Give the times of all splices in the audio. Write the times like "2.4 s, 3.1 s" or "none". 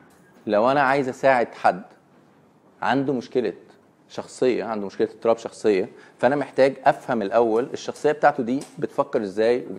none